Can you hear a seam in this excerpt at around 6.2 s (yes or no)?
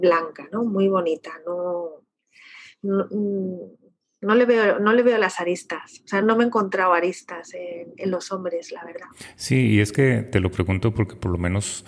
yes